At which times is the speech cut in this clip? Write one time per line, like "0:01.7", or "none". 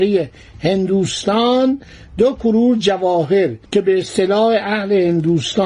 0:03.7